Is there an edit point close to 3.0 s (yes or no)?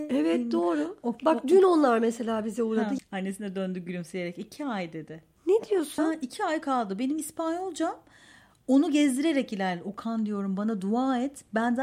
yes